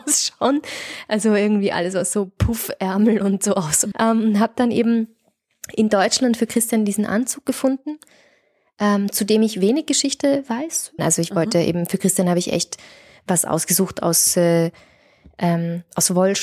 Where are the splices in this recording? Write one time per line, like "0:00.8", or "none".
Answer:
0:03.9
0:11.0